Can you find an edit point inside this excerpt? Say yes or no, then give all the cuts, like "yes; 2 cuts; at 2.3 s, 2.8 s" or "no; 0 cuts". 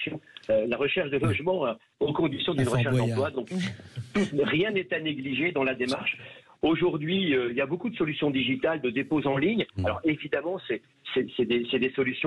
no; 0 cuts